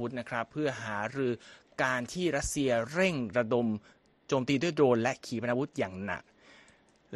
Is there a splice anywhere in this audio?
no; 0 cuts

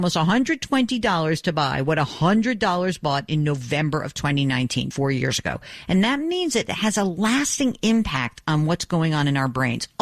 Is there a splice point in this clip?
yes; 1 cut; at 4.9 s

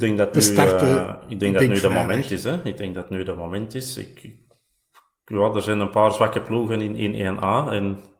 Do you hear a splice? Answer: no; 0 cuts

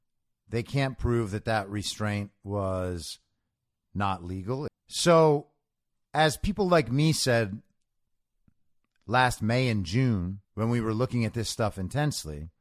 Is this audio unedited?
no; 2 cuts; at 4.7 s, 10.4 s

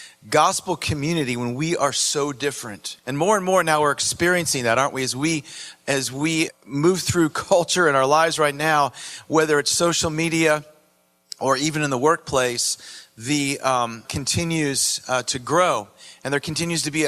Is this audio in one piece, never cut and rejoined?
no; 3 cuts; at 3.0 s, 6.5 s, 14.0 s

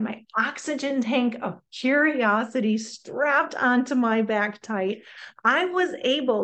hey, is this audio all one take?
yes; 0 cuts

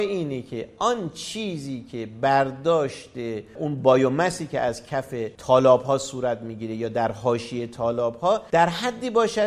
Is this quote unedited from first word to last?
yes; 0 cuts

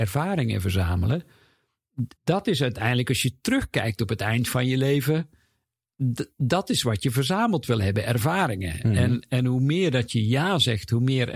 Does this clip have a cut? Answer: yes; 1 cut; at 2.2 s

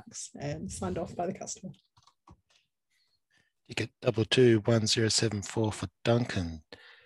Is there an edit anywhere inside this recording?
no; 0 cuts

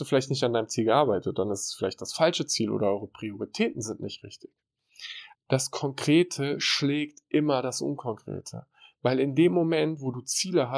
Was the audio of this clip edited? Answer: yes; 1 cut; at 5.3 s

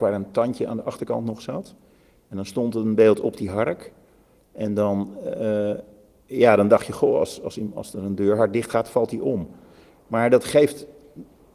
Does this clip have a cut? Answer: no; 0 cuts

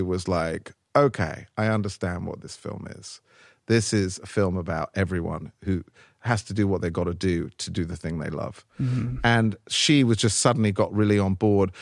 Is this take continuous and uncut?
yes; 0 cuts

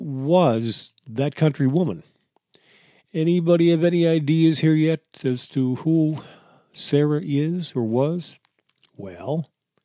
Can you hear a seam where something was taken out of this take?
no; 0 cuts

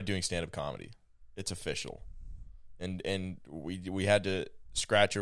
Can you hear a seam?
no; 0 cuts

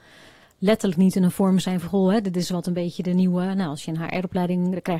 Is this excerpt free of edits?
yes; 0 cuts

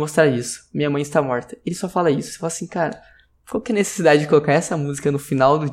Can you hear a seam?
no; 0 cuts

